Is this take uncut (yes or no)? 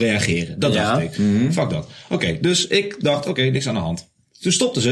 yes